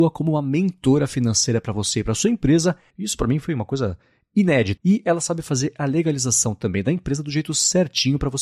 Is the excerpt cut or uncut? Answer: cut